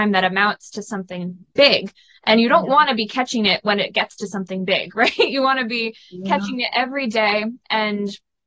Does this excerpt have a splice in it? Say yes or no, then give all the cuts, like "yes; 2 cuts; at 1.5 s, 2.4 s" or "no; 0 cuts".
no; 0 cuts